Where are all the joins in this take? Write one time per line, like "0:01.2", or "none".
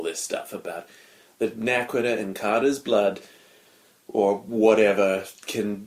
none